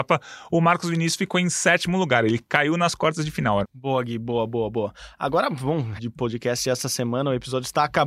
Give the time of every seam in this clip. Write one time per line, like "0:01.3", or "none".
0:03.6
0:06.0